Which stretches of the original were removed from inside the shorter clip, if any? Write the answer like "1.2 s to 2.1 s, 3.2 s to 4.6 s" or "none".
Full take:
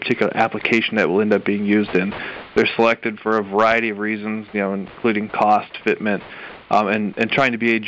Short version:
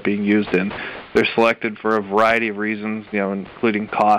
none